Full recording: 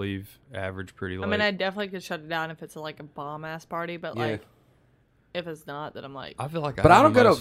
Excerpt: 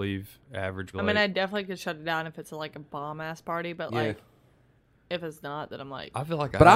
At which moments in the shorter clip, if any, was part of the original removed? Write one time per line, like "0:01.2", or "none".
0:00.9